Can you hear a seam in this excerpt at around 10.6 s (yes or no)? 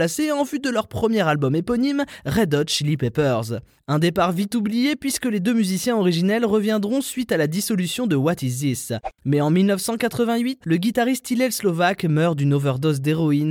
yes